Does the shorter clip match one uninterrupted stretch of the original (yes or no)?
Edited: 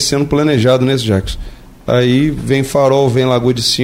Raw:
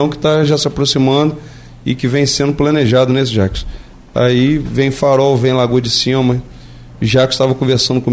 yes